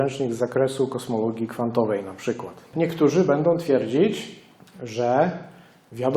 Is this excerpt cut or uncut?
cut